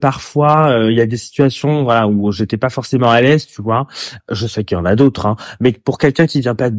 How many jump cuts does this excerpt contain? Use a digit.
1